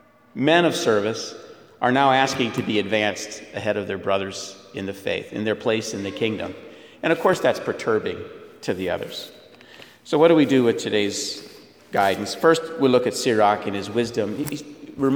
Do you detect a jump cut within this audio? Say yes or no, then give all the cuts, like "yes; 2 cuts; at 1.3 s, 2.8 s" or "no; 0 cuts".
no; 0 cuts